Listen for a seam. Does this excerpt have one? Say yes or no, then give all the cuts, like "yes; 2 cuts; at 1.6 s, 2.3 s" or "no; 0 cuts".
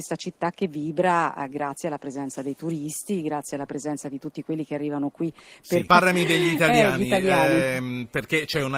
yes; 1 cut; at 5.9 s